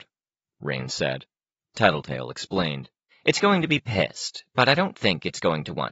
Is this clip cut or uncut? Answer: cut